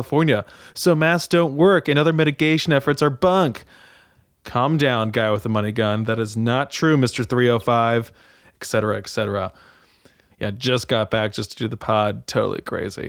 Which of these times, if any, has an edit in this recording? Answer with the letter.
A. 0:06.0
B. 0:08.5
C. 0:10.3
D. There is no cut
C